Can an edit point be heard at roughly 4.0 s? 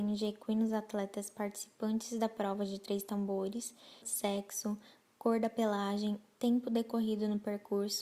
yes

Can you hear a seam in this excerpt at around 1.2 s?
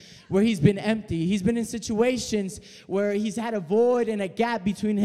no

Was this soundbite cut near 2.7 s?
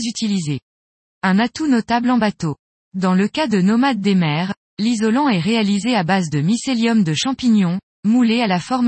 yes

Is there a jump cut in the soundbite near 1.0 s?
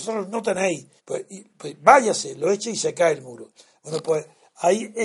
yes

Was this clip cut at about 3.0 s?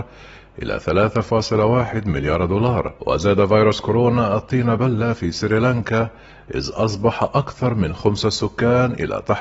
yes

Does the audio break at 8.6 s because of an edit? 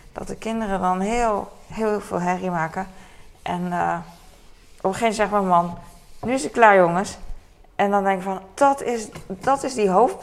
yes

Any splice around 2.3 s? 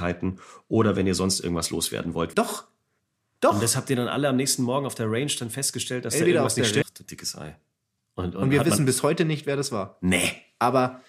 yes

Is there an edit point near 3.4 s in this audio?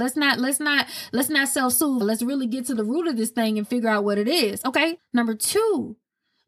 no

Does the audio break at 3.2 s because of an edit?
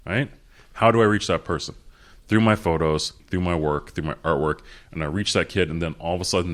yes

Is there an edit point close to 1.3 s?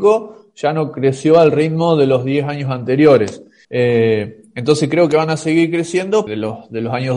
no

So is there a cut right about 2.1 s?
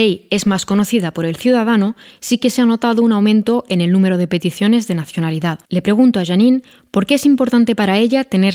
no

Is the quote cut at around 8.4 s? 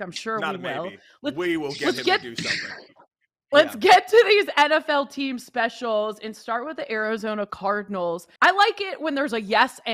yes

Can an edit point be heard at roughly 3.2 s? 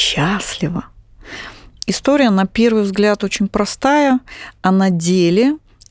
no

